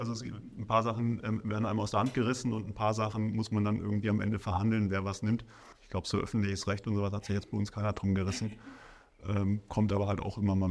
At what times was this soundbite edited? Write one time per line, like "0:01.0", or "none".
0:05.7